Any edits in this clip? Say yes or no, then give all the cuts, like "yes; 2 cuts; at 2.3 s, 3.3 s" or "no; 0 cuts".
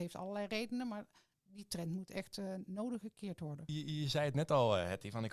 no; 0 cuts